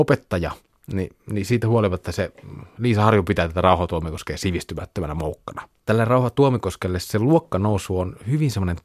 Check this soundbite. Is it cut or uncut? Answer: cut